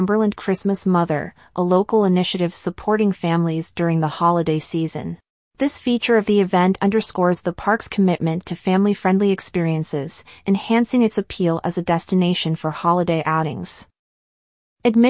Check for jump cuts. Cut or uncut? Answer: cut